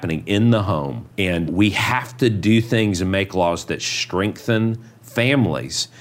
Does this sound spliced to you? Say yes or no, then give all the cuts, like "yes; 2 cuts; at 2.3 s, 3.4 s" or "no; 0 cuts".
yes; 1 cut; at 1.5 s